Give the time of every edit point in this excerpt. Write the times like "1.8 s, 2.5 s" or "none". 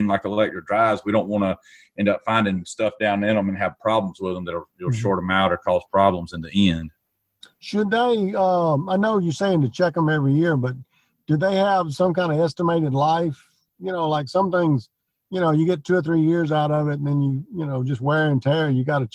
none